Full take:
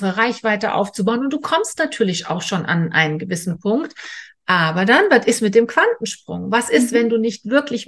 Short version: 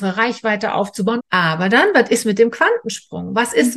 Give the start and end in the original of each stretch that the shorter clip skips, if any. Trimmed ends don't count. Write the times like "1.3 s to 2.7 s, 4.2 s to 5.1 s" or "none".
1.2 s to 4.4 s